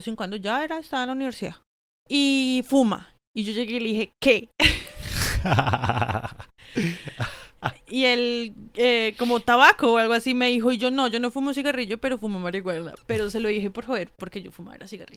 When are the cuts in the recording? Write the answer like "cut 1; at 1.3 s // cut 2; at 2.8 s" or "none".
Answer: none